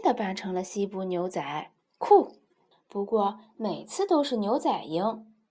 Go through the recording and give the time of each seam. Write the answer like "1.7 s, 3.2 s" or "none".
2.7 s